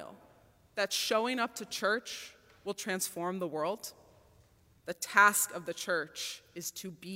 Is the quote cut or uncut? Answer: cut